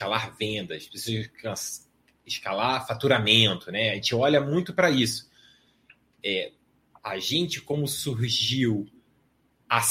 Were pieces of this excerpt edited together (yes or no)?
no